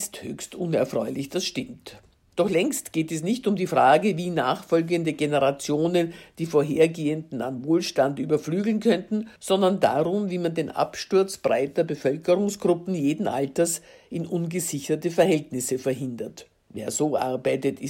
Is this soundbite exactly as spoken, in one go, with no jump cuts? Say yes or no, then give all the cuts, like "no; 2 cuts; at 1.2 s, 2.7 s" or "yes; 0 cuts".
no; 2 cuts; at 9.4 s, 16.6 s